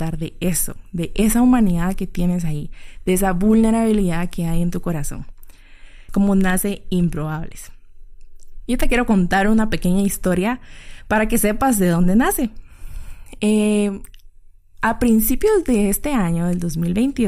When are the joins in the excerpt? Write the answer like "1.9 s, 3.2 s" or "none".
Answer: 6.1 s